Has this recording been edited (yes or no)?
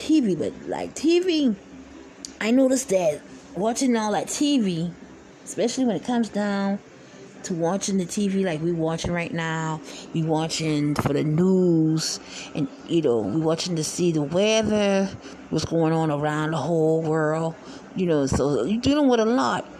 yes